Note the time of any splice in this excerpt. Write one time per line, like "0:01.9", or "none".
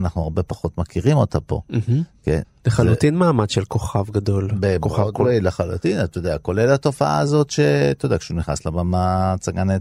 0:02.4